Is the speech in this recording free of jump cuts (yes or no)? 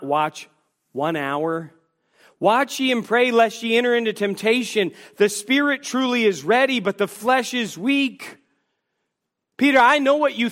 yes